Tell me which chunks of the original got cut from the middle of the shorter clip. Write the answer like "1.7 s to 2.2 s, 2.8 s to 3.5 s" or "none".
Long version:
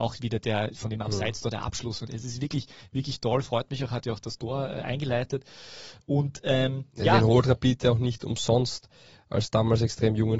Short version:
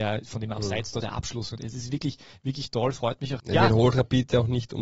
3.9 s to 6.9 s